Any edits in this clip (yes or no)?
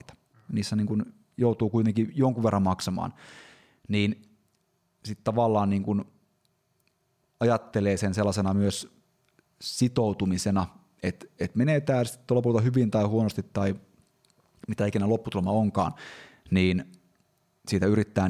no